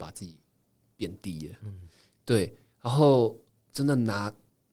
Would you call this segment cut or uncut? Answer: uncut